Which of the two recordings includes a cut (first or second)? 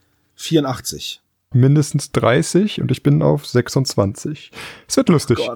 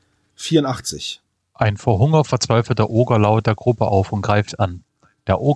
first